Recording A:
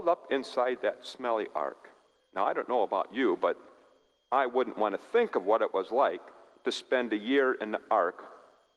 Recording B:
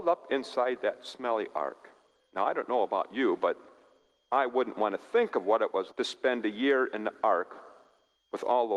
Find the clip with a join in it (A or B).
B